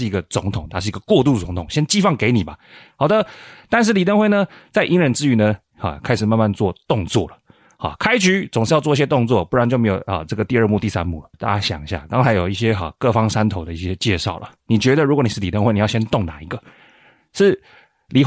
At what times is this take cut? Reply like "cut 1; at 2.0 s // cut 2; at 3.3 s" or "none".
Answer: cut 1; at 11.3 s